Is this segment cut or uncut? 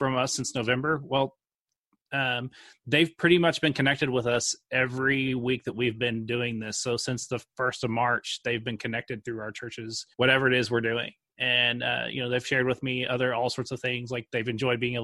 cut